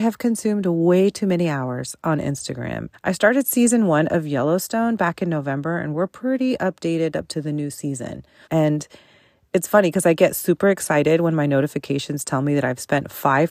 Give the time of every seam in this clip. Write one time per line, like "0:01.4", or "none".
0:02.9
0:08.4